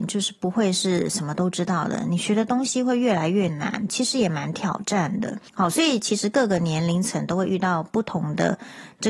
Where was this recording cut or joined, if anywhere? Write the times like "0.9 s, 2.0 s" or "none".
5.5 s